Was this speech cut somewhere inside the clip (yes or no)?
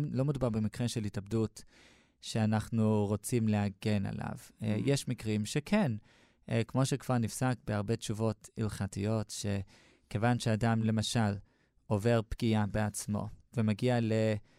no